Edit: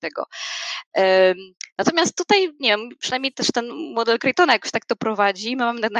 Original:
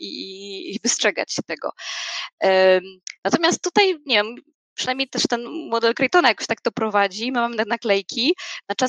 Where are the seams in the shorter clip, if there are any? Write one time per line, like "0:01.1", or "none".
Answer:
0:03.0